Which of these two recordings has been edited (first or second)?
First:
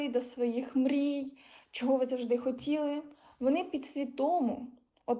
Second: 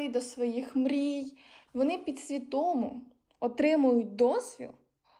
second